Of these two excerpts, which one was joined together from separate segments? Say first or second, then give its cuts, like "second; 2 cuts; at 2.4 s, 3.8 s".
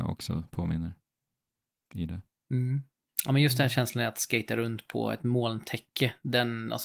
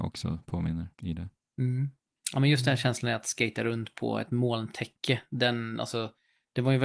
second; 1 cut; at 0.9 s